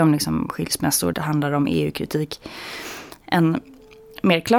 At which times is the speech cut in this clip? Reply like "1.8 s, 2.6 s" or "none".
1.1 s